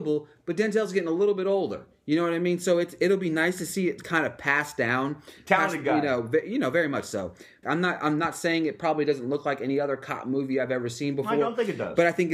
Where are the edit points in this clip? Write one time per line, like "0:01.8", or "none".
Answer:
0:07.6